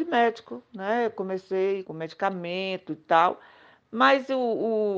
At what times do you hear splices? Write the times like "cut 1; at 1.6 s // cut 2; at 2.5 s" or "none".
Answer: cut 1; at 1.8 s